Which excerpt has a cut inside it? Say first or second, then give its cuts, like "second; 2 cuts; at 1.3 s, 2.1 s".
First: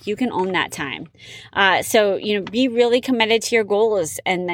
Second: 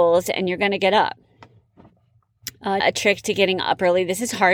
second; 1 cut; at 2.8 s